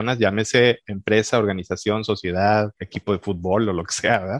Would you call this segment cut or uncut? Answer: uncut